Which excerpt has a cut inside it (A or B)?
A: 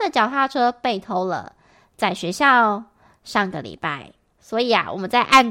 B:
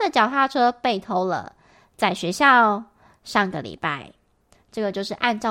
A